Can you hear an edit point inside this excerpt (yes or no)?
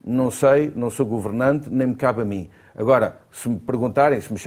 no